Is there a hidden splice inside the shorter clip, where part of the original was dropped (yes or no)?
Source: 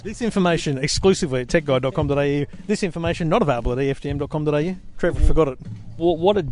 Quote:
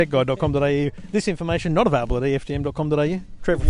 no